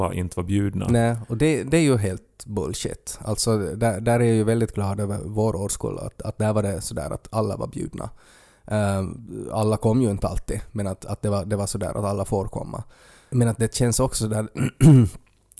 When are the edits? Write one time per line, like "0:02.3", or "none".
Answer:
none